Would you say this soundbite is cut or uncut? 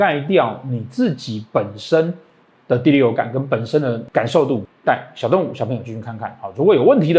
uncut